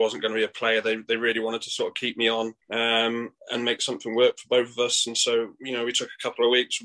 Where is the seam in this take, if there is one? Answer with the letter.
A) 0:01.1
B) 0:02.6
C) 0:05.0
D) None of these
B